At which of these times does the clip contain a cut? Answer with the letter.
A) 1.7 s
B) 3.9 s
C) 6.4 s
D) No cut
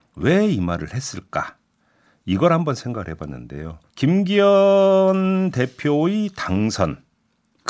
B